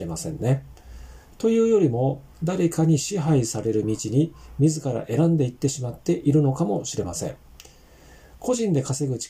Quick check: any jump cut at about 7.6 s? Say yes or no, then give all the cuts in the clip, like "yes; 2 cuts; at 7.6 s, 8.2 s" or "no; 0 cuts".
no; 1 cut; at 2.3 s